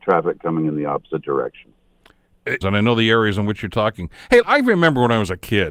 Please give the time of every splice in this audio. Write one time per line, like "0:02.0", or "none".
0:02.6
0:04.4